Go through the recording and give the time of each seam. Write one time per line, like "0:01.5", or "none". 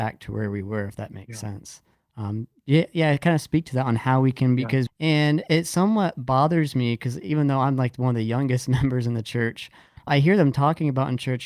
0:04.9
0:10.1